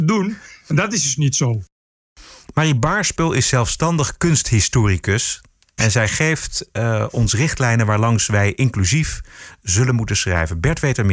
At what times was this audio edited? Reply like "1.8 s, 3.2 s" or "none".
5.8 s

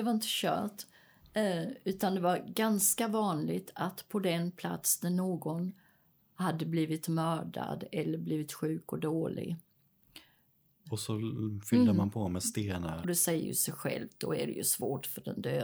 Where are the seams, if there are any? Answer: 10.8 s, 13.0 s

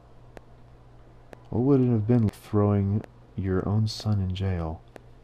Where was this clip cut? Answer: 2.3 s

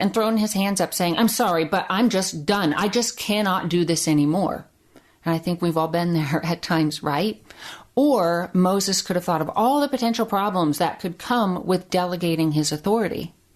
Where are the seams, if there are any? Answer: none

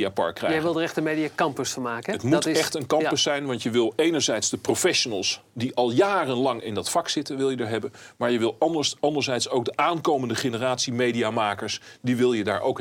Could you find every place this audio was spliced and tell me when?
none

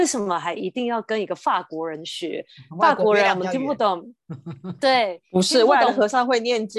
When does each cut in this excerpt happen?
none

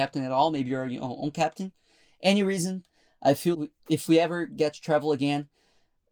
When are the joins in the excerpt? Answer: 3.5 s

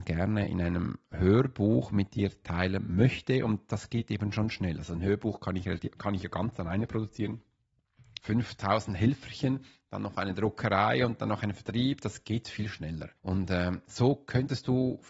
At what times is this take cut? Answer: 8.2 s, 13.2 s

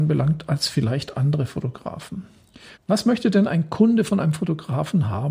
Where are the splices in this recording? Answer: 2.7 s

